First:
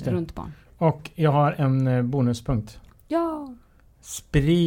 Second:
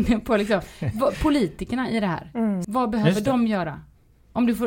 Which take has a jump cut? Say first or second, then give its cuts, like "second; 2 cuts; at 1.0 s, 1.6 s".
second; 1 cut; at 2.6 s